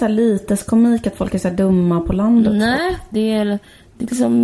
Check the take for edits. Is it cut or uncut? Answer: cut